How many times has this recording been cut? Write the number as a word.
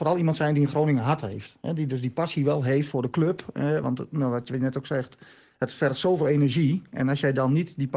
zero